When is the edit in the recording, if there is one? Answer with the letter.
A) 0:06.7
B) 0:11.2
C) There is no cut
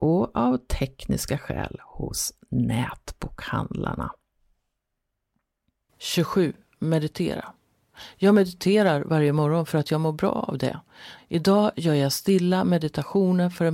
B